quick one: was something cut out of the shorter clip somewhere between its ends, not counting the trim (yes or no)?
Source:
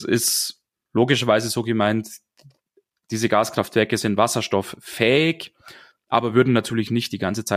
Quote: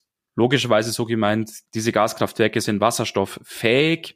yes